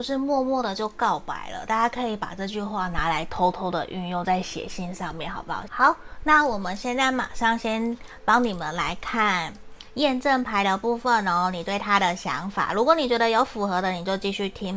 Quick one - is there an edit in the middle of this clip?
yes; 1 cut; at 5.7 s

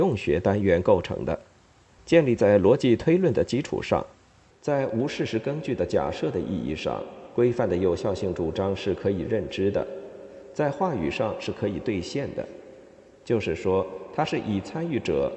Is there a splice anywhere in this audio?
yes; 2 cuts; at 2.0 s, 4.5 s

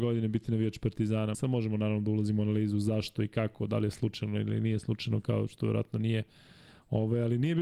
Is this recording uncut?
no; 1 cut; at 1.3 s

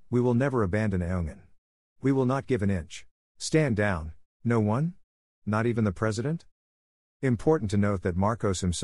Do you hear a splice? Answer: yes; 2 cuts; at 3.2 s, 4.3 s

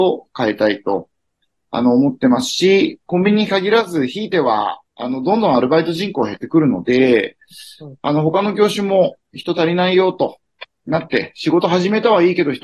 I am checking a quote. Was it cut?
no; 0 cuts

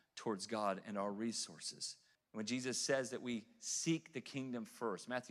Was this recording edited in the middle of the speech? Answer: yes; 1 cut; at 2.2 s

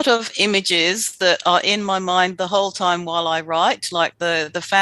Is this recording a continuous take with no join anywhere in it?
yes; 0 cuts

